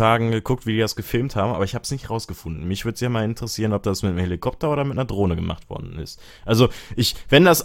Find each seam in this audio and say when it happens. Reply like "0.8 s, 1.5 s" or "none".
none